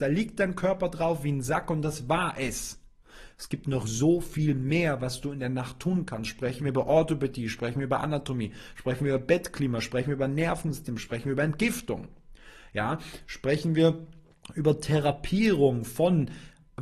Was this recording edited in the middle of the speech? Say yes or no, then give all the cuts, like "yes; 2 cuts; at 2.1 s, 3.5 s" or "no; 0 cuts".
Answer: yes; 1 cut; at 11.0 s